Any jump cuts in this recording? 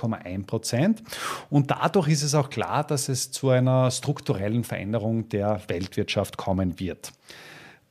no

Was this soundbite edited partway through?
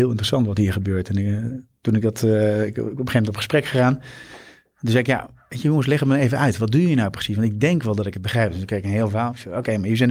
no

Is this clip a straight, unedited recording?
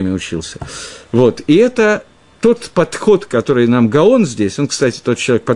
yes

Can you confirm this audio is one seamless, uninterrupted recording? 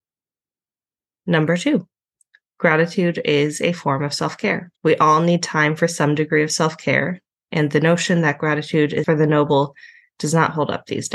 no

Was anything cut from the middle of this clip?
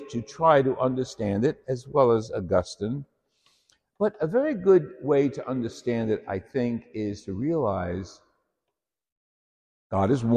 no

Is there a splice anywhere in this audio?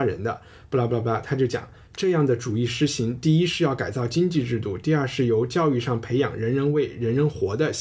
no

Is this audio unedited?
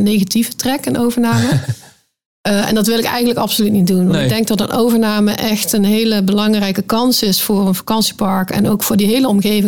yes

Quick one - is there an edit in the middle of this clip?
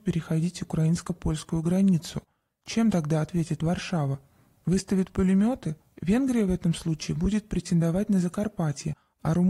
yes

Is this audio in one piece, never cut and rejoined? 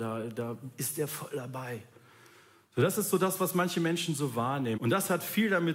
no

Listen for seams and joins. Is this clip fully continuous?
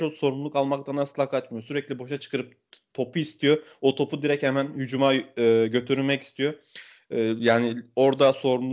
yes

